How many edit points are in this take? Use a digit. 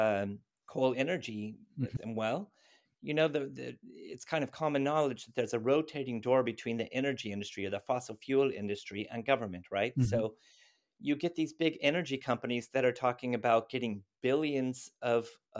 1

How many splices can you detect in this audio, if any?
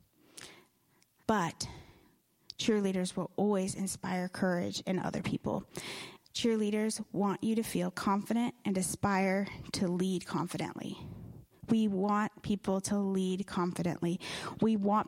2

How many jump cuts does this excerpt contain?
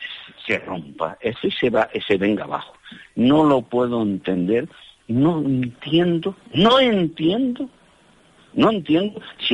1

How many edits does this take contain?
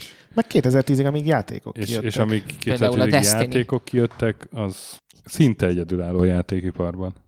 1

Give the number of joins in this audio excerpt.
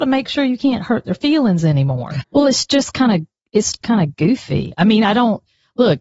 2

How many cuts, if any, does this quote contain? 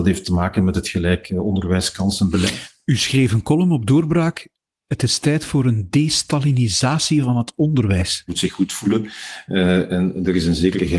1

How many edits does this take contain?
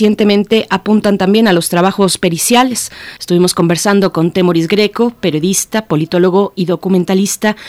1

